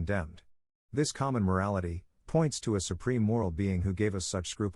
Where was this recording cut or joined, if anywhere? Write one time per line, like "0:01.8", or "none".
0:02.2